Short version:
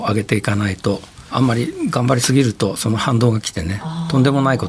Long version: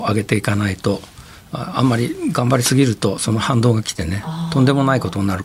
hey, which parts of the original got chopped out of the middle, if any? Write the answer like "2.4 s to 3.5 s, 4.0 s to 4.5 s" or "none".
1.3 s to 1.7 s